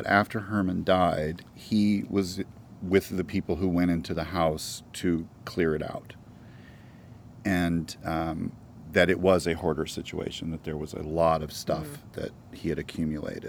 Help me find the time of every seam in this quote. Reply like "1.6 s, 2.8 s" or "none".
none